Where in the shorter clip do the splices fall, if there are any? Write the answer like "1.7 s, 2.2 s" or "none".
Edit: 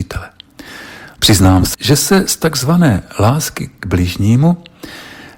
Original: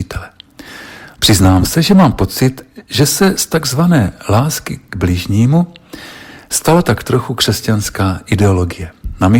1.7 s